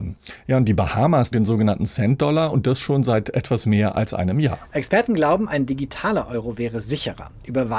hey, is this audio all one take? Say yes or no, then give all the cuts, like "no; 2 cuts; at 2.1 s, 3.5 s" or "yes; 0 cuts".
no; 1 cut; at 1.3 s